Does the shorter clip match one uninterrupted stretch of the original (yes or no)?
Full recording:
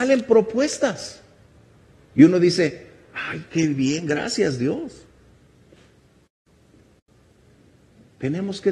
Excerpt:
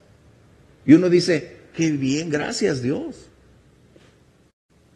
no